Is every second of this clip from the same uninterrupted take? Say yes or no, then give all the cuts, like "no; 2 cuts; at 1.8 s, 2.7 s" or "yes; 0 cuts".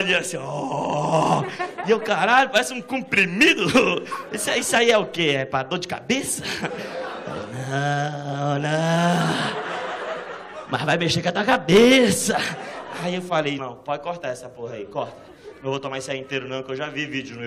no; 1 cut; at 13.6 s